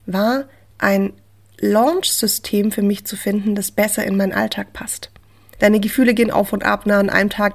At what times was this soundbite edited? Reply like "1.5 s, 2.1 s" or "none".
5.5 s